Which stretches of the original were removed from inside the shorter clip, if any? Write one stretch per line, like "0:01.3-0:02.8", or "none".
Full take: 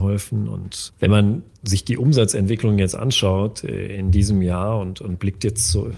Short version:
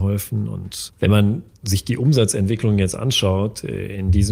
none